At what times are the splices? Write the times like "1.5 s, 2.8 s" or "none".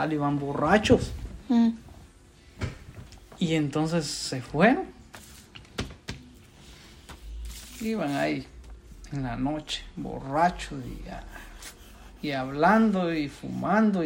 none